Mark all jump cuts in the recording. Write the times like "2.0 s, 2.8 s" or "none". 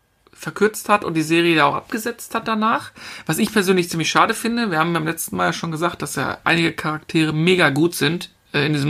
none